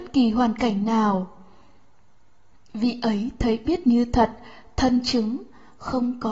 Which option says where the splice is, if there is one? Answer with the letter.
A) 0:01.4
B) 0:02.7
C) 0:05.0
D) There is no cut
D